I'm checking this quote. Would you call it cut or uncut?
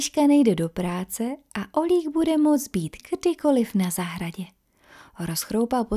uncut